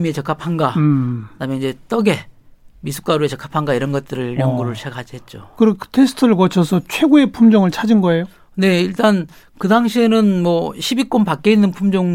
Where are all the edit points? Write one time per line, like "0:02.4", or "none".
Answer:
none